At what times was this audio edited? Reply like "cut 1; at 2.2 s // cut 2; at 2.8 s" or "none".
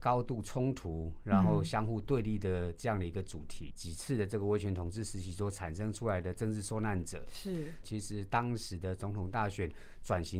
cut 1; at 3.7 s // cut 2; at 7.8 s

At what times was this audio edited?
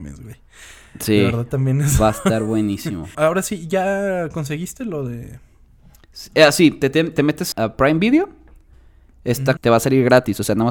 cut 1; at 3.1 s // cut 2; at 7.5 s // cut 3; at 9.6 s

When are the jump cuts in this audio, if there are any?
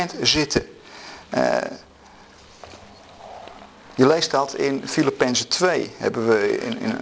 none

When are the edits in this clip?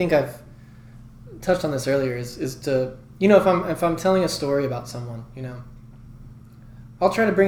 none

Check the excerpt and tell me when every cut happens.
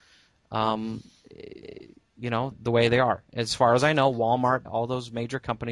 cut 1; at 2.5 s // cut 2; at 4.7 s

